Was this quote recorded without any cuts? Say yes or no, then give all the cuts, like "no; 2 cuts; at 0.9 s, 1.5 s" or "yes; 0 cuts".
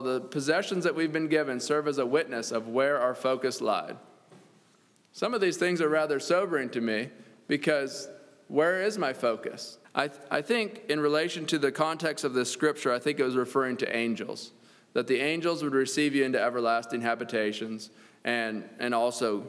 no; 1 cut; at 9.8 s